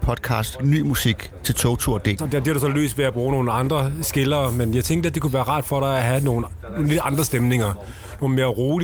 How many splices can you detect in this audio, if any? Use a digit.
1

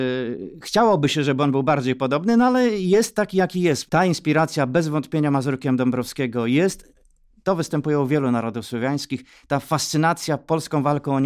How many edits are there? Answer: 1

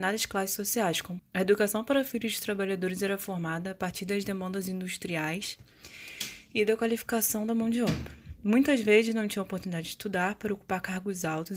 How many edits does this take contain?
1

